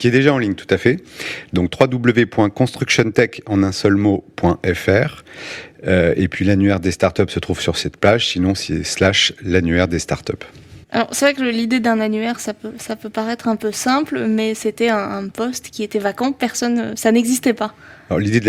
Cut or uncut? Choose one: cut